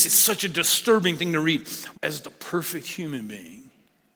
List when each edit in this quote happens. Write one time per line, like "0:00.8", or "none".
0:01.9

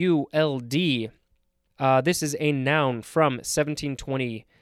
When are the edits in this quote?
0:01.7

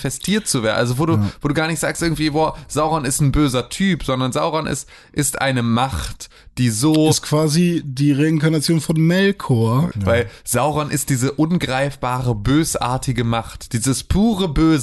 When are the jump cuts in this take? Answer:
0:09.9

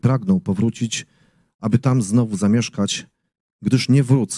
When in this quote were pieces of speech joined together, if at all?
none

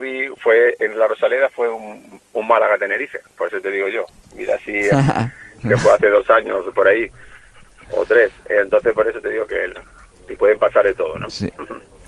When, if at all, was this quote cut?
0:10.1

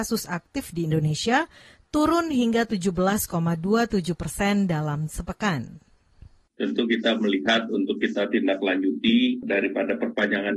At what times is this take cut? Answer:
none

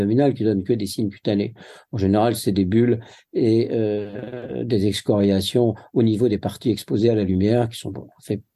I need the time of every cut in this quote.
none

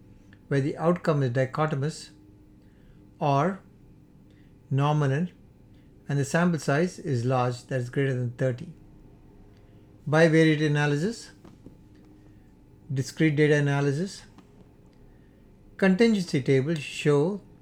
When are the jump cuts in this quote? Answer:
0:10.0

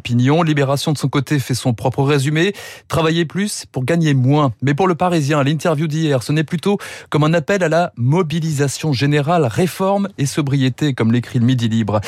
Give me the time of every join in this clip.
none

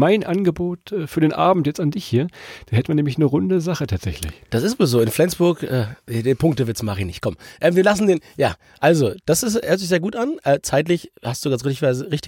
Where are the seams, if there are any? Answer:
none

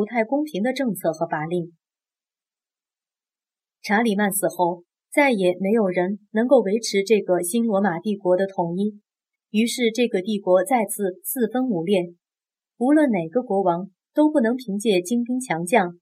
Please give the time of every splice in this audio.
none

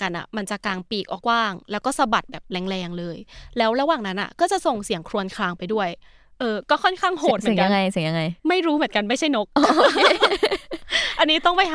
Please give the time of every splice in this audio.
0:01.2
0:08.4

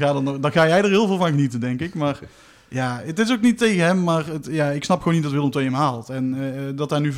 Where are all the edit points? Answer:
none

